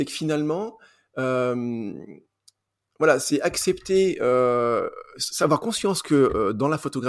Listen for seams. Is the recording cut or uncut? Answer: uncut